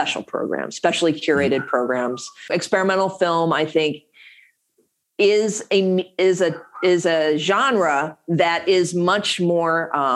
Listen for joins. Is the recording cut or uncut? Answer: cut